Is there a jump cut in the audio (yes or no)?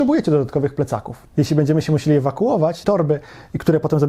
yes